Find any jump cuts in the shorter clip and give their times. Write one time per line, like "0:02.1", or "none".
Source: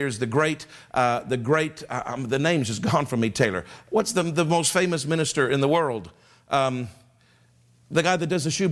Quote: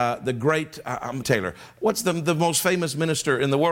0:01.2